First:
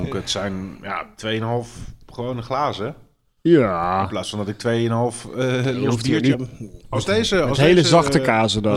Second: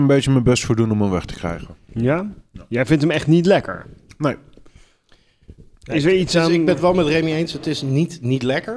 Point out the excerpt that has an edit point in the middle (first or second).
first